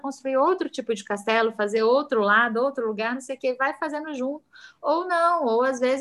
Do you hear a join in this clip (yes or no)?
no